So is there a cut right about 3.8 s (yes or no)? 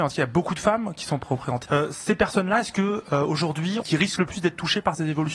yes